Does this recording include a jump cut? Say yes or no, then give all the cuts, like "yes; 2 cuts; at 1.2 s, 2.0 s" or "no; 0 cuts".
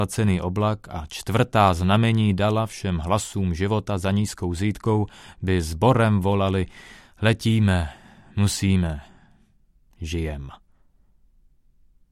no; 0 cuts